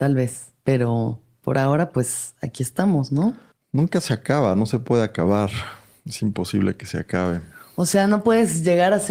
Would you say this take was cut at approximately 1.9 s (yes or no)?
no